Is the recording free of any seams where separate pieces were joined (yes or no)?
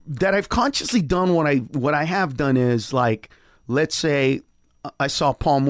yes